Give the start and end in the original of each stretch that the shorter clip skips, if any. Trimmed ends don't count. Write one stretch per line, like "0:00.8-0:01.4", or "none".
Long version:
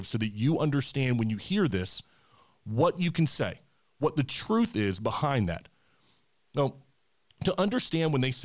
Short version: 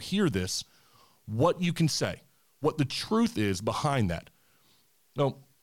none